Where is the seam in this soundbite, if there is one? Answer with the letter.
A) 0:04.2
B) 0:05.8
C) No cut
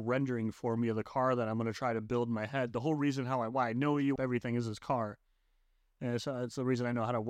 A